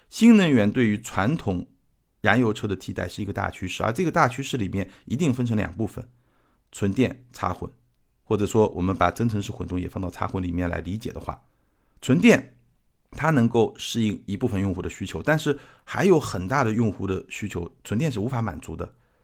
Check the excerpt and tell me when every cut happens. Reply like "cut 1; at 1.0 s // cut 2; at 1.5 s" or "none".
none